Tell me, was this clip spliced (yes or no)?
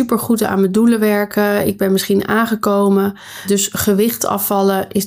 no